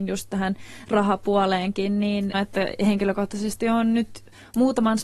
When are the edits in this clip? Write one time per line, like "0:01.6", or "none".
0:02.3